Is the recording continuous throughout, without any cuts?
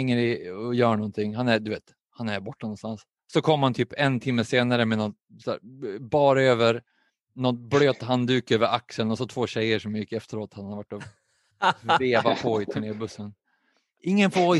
yes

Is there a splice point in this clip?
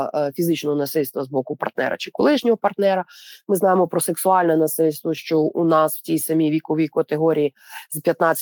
no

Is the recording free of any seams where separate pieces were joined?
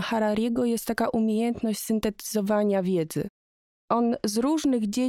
yes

